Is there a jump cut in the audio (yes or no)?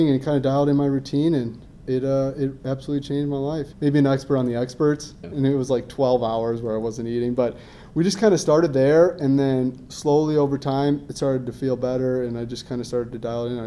yes